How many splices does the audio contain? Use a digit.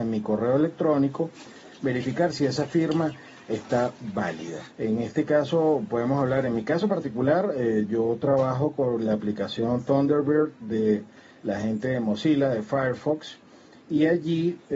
1